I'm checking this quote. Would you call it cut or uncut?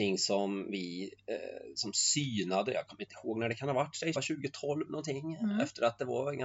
cut